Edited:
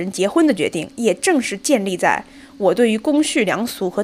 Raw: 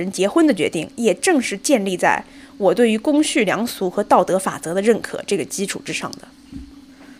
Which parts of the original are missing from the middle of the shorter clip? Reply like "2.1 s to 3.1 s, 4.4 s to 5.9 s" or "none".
none